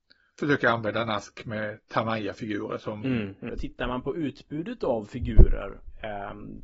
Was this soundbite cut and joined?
yes; 1 cut; at 3.5 s

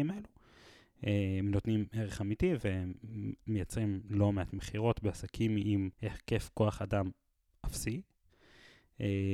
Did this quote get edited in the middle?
yes; 1 cut; at 5.9 s

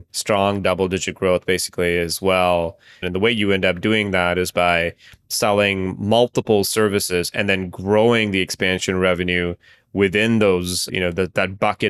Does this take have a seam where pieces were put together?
yes; 2 cuts; at 3.0 s, 10.9 s

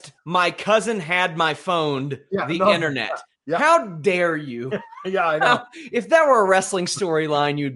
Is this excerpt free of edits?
yes; 0 cuts

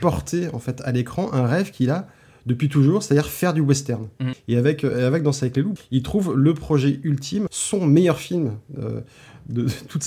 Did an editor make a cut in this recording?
yes; 3 cuts; at 4.3 s, 5.8 s, 7.5 s

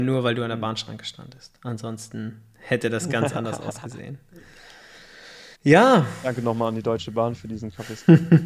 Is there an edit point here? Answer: yes; 1 cut; at 5.5 s

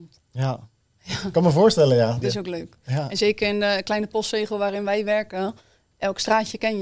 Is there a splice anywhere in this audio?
yes; 1 cut; at 2.2 s

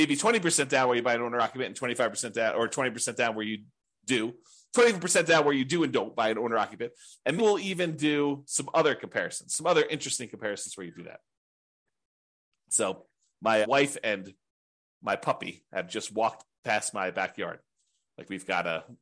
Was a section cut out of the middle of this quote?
yes; 2 cuts; at 7.4 s, 13.6 s

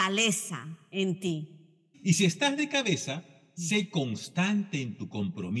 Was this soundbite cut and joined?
yes; 1 cut; at 1.9 s

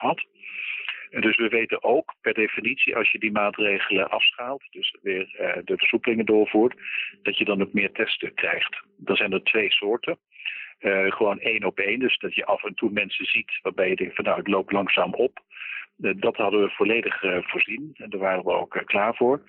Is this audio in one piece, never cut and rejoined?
yes; 0 cuts

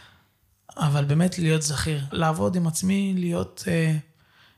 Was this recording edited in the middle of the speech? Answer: yes; 1 cut; at 2.1 s

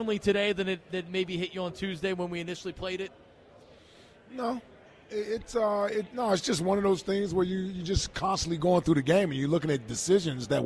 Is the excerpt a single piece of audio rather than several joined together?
yes; 0 cuts

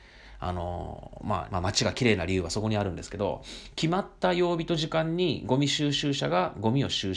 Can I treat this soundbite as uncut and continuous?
no; 1 cut; at 1.5 s

